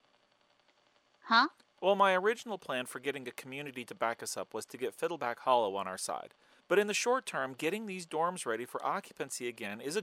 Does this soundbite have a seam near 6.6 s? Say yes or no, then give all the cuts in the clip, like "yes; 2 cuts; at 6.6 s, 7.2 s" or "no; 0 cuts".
yes; 1 cut; at 6.6 s